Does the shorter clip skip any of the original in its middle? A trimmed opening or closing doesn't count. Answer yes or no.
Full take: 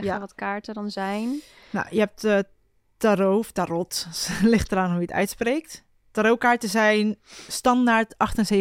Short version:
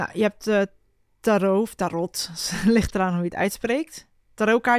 no